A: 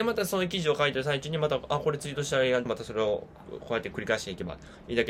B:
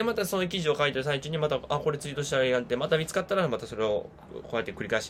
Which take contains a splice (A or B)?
A